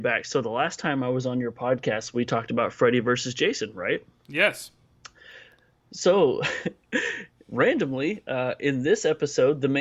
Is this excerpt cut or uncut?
uncut